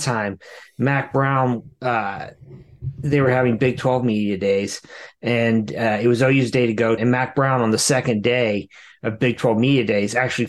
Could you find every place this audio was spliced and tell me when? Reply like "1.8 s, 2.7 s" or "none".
7.0 s